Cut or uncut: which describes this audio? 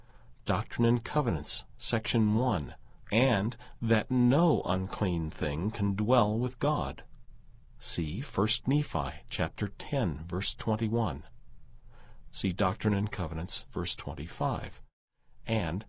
cut